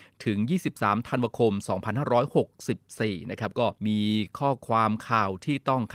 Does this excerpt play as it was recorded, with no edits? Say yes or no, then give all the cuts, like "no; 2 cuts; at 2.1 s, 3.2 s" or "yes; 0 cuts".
no; 1 cut; at 3.8 s